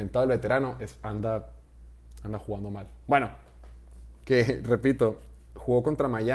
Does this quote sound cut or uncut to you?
cut